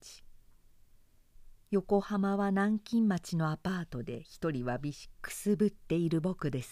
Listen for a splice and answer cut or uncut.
cut